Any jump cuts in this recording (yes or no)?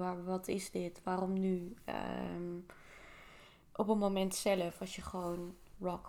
no